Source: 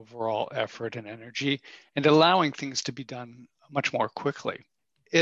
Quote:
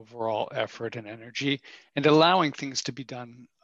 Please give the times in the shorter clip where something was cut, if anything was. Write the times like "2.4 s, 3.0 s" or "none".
none